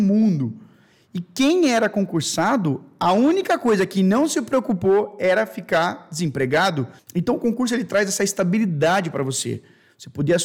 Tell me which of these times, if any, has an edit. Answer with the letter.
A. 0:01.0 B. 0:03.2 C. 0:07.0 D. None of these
C